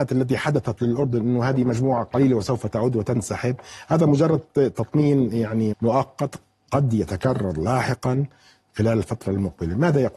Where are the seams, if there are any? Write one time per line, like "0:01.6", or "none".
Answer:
0:05.7